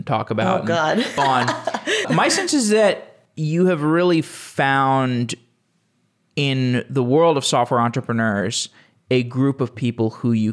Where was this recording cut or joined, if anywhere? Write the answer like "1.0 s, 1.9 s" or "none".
1.2 s